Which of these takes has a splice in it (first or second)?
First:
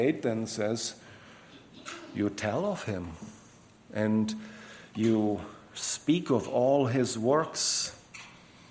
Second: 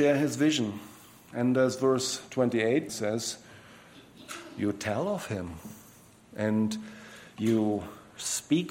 second